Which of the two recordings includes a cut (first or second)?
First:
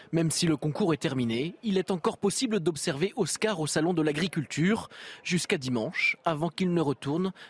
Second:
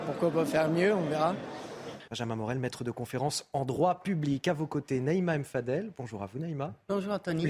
second